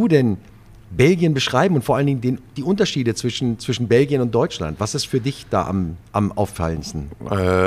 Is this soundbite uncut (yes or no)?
yes